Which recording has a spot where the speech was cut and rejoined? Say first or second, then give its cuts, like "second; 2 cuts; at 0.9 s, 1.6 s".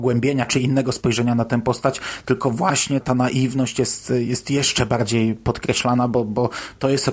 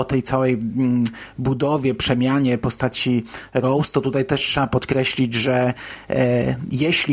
first; 1 cut; at 3.0 s